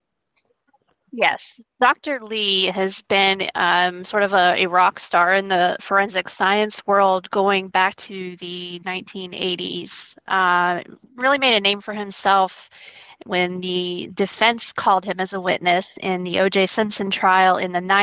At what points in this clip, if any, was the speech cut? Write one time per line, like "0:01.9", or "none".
none